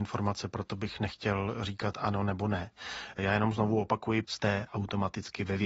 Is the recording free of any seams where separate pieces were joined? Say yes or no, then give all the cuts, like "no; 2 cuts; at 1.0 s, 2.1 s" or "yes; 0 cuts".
no; 1 cut; at 4.2 s